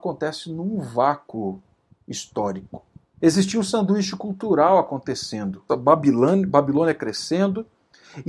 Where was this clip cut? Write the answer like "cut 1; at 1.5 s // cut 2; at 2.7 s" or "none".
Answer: cut 1; at 3.2 s // cut 2; at 5.7 s